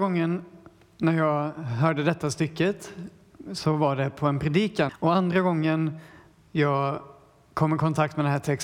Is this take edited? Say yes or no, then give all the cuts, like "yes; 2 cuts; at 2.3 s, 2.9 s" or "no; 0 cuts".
yes; 1 cut; at 4.9 s